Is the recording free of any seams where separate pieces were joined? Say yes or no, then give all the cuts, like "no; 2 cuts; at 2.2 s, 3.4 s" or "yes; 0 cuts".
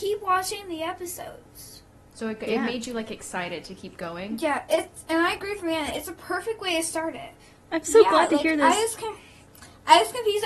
no; 1 cut; at 7.7 s